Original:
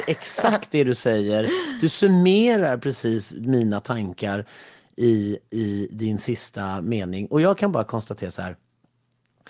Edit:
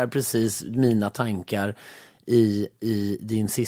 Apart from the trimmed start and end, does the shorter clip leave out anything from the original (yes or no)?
no